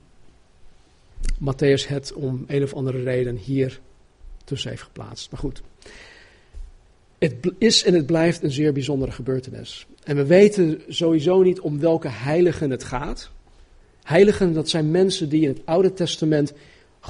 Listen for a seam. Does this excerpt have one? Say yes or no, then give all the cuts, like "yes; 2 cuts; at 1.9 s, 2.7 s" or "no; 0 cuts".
no; 0 cuts